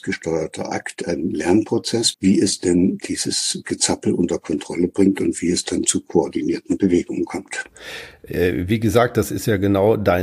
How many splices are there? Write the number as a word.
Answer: one